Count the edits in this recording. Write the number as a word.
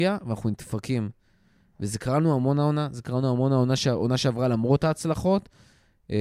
zero